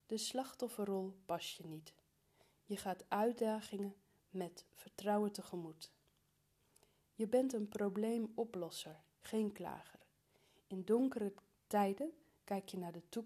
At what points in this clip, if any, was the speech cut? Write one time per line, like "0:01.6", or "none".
0:09.1

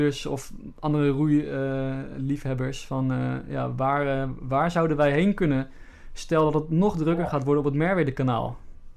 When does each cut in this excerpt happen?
none

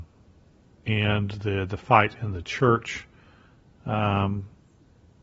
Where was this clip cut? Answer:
none

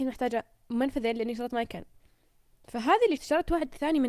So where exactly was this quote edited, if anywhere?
0:03.2

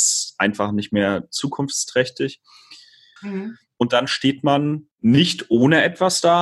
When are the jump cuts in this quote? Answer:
0:03.2
0:04.9

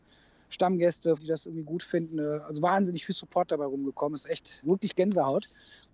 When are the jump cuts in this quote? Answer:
0:01.2
0:04.6

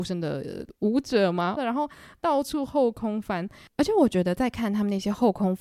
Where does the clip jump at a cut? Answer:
0:01.6

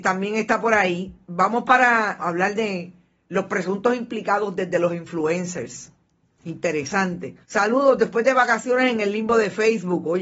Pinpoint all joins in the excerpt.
0:02.2
0:07.4

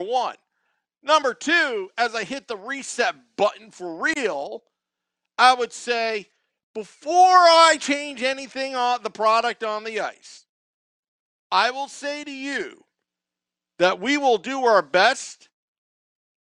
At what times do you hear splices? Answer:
none

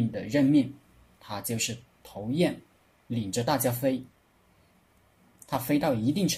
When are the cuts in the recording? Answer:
none

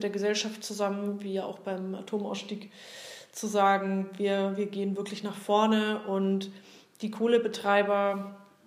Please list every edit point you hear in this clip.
none

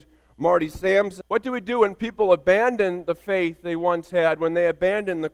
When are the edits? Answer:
0:01.2

